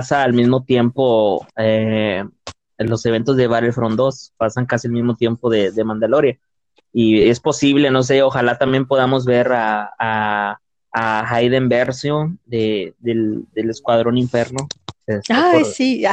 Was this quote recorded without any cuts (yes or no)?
no